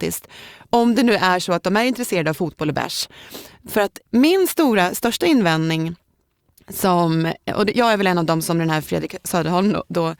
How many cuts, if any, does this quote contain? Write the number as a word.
one